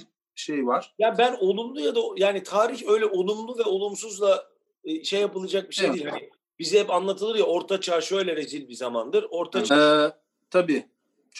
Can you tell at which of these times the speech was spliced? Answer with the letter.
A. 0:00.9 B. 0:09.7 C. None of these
B